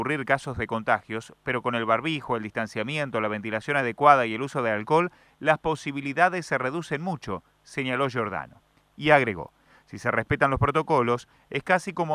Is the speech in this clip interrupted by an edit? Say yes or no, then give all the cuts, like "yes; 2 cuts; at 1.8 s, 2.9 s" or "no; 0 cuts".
no; 0 cuts